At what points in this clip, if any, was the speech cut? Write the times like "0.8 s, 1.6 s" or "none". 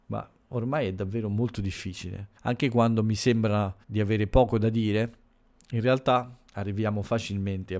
2.4 s, 3.8 s